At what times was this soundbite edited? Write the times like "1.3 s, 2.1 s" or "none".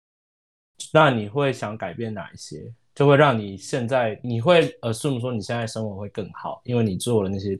4.2 s